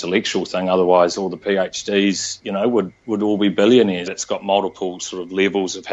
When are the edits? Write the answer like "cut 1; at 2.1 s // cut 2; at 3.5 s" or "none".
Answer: cut 1; at 4.1 s